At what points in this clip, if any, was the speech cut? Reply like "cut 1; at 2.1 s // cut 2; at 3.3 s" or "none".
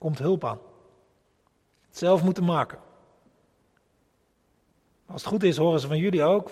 cut 1; at 1.8 s